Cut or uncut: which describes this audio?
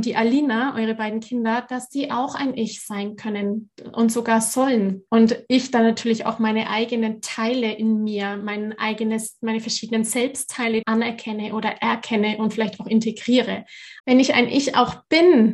cut